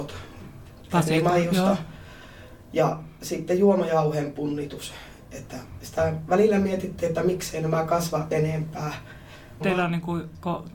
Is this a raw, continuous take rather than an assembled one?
no; 1 cut; at 9.6 s

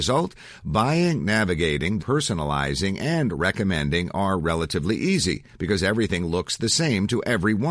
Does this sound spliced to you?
yes; 1 cut; at 2.0 s

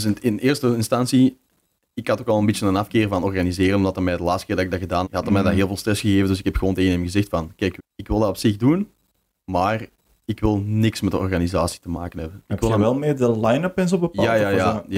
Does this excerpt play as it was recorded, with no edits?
no; 2 cuts; at 5.0 s, 7.8 s

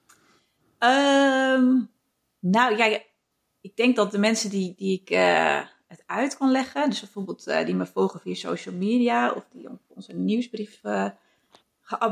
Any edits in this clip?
no; 0 cuts

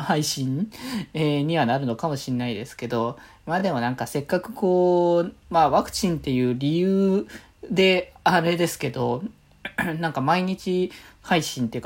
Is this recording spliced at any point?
no; 0 cuts

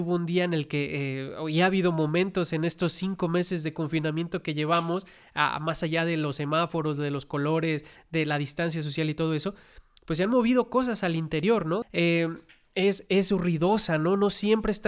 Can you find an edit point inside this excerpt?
yes; 1 cut; at 11.8 s

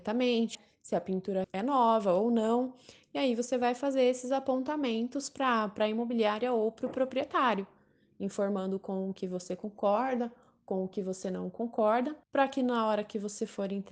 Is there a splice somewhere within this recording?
yes; 2 cuts; at 1.4 s, 12.2 s

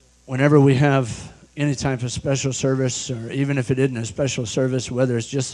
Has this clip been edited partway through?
no; 0 cuts

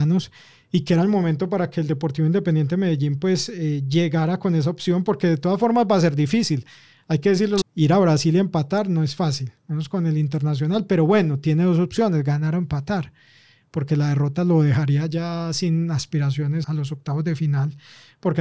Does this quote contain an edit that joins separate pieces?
yes; 2 cuts; at 7.6 s, 16.6 s

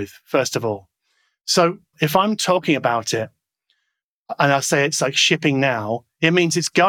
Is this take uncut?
no; 1 cut; at 1.9 s

